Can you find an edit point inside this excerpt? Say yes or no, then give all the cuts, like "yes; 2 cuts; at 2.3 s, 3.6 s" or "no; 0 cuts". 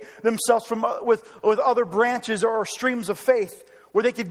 no; 0 cuts